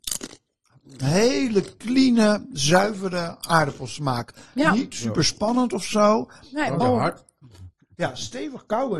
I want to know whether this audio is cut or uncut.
cut